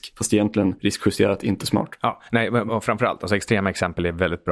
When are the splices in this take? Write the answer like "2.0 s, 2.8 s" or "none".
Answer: 2.7 s

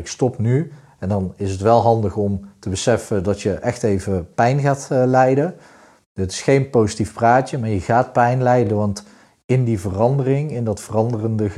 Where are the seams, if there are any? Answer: none

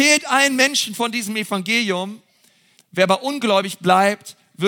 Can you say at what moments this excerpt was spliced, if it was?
2.7 s

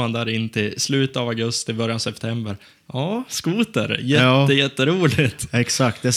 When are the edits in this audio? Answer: none

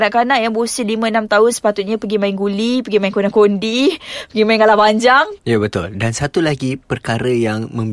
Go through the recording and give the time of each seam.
5.4 s

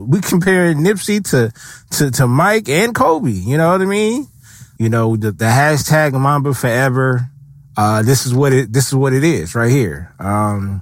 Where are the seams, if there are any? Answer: 4.8 s

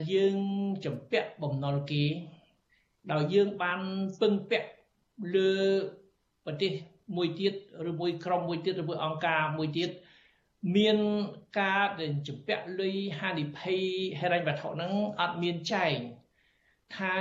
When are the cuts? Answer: none

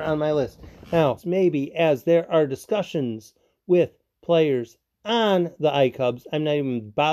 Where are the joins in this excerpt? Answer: 1.2 s

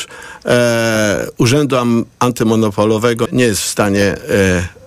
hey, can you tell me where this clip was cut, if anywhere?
3.3 s

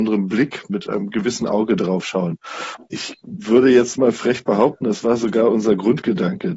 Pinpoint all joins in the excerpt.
2.8 s

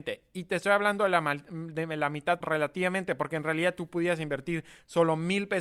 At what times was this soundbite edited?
2.4 s

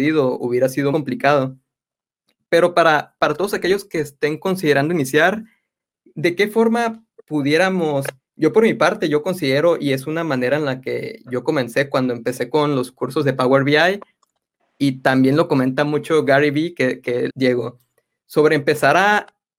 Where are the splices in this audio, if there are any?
0.9 s, 8.2 s, 17.3 s

